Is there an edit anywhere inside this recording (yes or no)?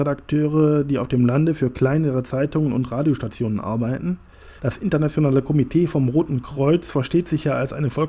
yes